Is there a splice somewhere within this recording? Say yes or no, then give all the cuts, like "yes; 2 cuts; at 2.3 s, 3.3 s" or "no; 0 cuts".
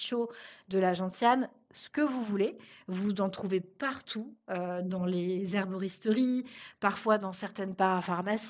no; 0 cuts